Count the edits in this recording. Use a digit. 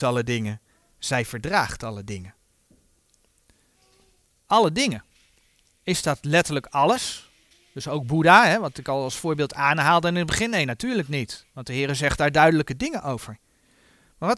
0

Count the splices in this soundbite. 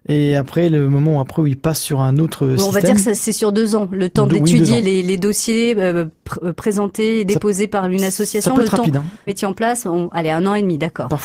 2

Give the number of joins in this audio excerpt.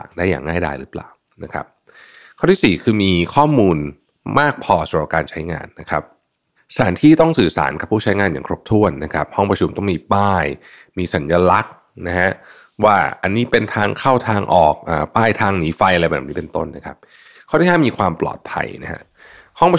0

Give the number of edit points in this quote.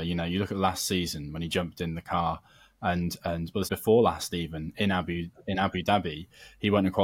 1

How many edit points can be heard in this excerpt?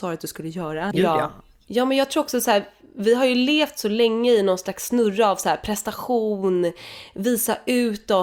1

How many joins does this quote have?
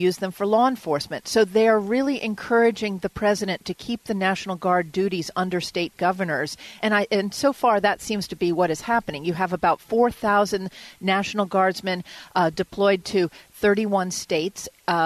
0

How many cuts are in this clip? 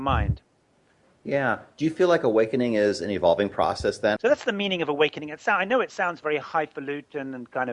1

